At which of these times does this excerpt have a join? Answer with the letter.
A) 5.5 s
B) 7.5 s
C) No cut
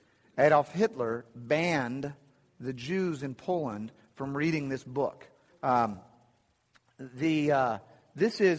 A